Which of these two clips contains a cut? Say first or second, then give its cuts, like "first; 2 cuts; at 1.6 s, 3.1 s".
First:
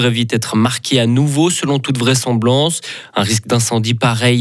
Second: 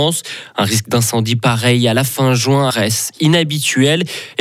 second; 1 cut; at 2.7 s